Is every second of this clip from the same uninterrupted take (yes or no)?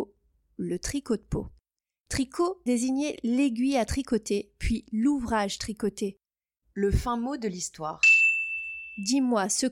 no